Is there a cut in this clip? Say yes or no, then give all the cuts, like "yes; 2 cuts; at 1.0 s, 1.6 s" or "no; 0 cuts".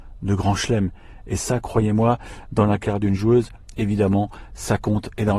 no; 0 cuts